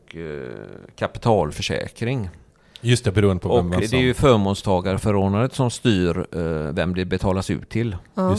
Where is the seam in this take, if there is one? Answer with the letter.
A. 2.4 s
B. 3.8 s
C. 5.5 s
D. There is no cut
B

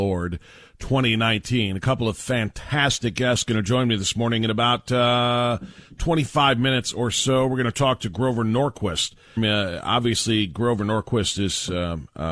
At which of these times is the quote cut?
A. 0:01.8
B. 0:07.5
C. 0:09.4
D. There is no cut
C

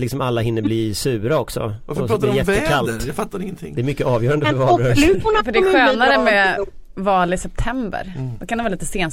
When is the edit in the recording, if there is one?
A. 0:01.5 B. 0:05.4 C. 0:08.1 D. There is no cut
D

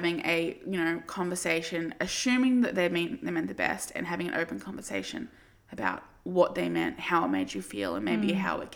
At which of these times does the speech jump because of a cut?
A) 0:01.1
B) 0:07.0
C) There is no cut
C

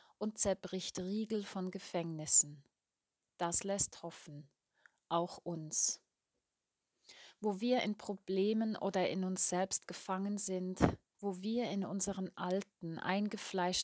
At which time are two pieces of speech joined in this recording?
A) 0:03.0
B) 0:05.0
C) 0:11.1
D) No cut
C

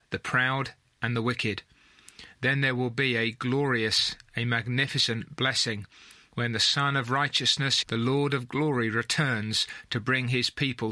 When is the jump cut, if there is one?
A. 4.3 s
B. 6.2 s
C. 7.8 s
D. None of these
C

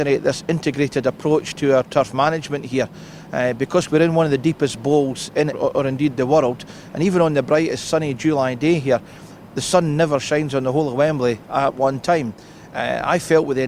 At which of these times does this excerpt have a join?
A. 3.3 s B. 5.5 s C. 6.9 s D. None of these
B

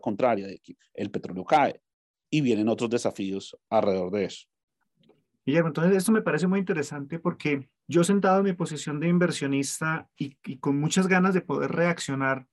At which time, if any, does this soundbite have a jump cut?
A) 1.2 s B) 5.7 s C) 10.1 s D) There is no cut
C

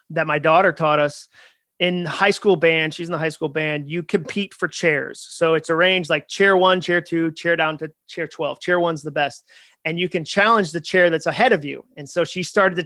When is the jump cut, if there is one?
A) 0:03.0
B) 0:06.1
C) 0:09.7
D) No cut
D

